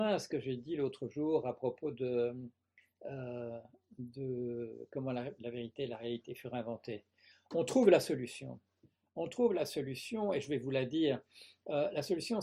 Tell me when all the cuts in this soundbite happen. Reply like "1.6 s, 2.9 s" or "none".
none